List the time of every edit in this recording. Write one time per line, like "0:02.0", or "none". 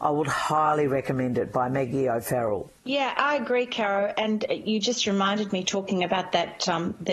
0:03.1